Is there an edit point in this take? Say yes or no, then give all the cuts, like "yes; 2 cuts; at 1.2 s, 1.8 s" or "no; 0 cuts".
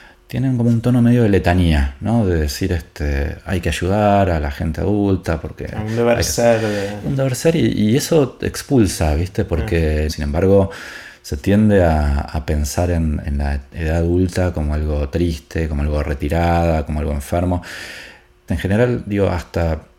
yes; 3 cuts; at 10.1 s, 13.2 s, 18.5 s